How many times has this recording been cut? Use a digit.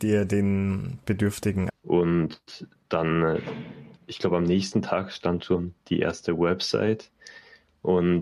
1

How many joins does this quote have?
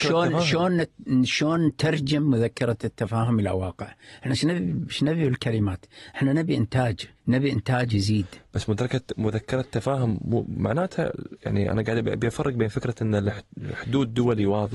1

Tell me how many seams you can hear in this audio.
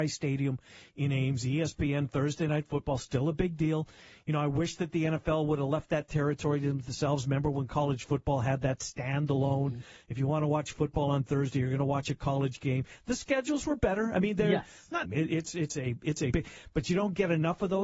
2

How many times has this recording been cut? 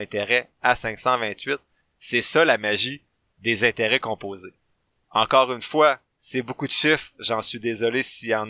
1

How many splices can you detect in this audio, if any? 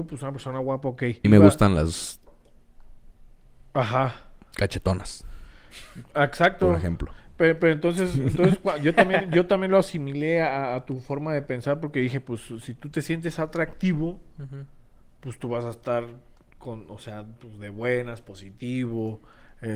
1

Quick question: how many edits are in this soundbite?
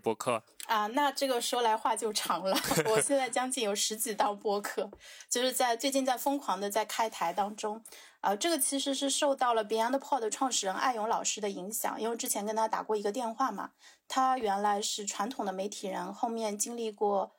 0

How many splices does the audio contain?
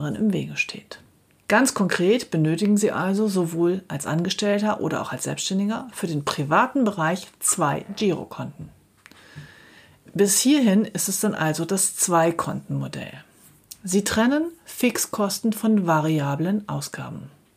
1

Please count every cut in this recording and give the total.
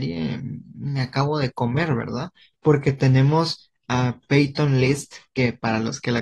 0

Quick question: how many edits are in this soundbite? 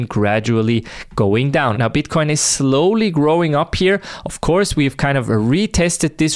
1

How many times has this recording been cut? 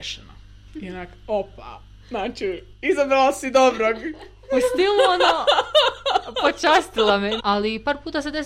2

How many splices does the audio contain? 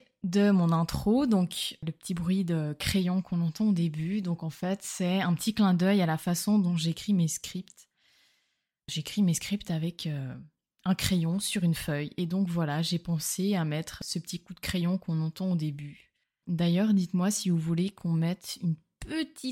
1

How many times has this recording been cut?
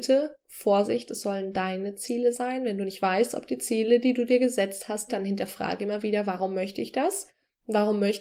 1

